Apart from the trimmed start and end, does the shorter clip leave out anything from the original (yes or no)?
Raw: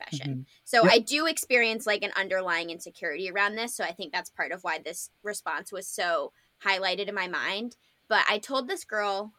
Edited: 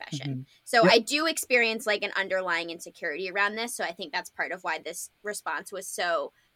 no